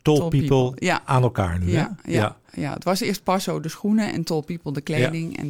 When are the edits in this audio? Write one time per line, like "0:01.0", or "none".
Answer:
none